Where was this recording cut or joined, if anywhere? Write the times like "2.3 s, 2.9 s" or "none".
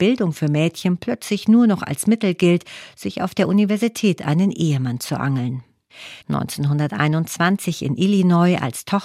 6.2 s